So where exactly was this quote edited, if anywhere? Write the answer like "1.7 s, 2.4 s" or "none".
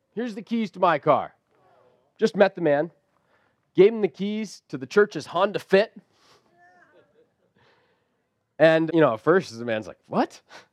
8.9 s